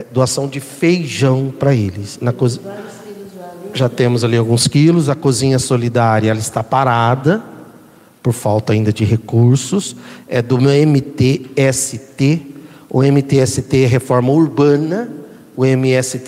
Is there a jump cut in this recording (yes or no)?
no